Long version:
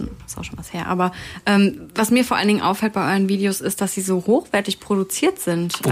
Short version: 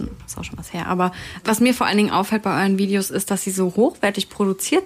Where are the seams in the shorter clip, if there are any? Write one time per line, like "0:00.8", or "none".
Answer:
0:01.4